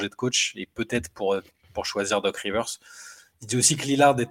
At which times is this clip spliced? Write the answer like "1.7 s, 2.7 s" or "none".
none